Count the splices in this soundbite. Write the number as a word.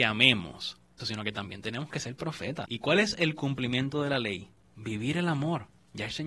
two